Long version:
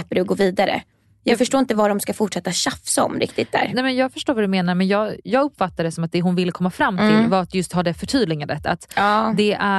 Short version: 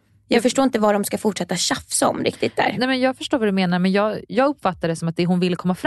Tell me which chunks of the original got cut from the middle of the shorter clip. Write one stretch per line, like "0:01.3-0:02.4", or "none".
none

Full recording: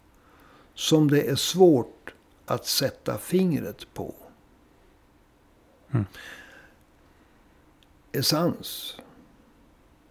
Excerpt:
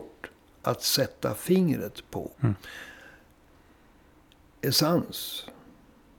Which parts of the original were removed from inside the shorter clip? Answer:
0:04.2-0:05.8

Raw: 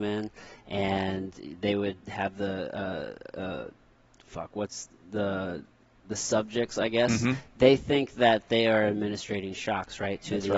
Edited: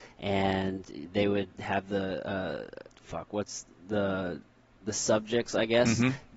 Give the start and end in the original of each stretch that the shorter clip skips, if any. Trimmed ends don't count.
0:03.3-0:04.1

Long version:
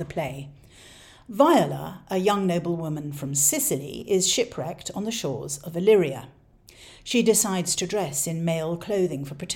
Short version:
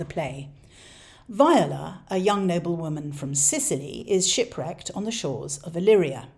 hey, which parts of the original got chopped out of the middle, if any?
none

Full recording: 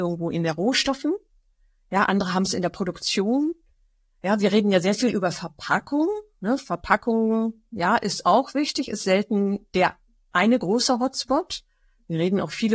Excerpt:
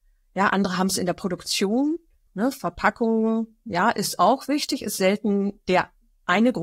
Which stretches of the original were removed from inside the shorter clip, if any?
0:03.8-0:06.3

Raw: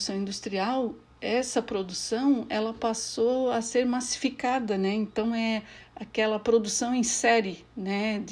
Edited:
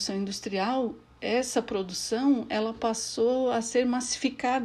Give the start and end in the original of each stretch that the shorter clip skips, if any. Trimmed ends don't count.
none

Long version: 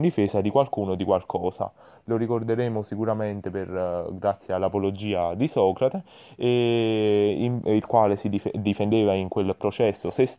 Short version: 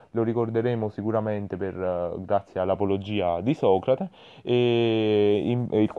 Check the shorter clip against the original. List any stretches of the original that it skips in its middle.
none

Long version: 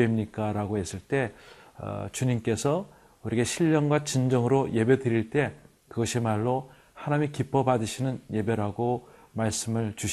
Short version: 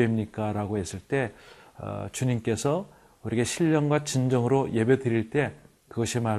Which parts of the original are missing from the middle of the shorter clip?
none

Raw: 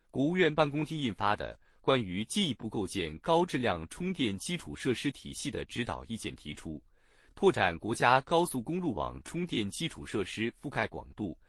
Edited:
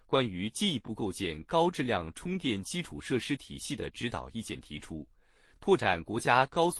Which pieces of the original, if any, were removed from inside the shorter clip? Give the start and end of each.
none

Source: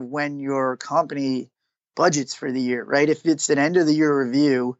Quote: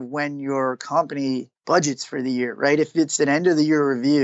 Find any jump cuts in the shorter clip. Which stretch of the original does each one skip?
0:01.6-0:01.9

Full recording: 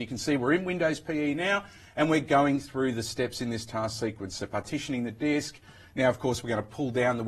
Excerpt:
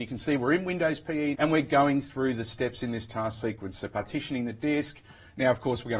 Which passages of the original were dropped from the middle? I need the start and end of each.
0:01.3-0:01.9

